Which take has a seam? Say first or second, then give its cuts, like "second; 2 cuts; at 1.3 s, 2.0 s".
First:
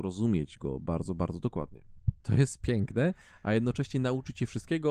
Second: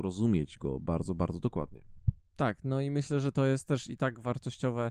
first; 1 cut; at 2.2 s